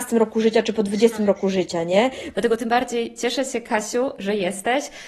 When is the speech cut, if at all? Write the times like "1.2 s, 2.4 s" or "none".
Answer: 2.3 s